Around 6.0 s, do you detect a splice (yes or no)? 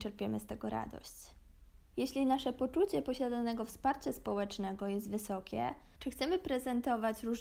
yes